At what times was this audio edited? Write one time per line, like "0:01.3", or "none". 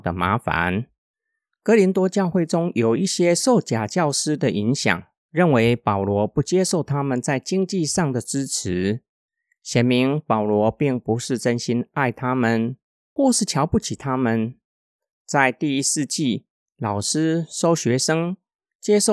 none